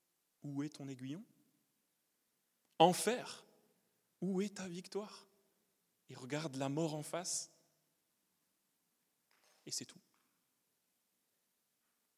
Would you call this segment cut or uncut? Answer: uncut